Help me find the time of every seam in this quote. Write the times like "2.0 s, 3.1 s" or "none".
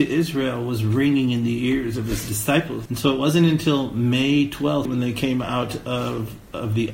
2.9 s, 4.9 s